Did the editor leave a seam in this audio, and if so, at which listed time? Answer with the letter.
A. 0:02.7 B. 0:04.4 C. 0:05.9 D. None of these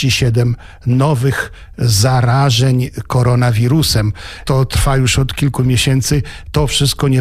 B